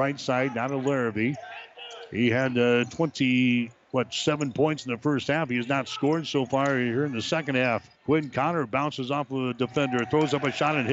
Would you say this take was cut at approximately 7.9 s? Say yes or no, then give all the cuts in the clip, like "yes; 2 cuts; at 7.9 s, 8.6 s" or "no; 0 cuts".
yes; 1 cut; at 7.9 s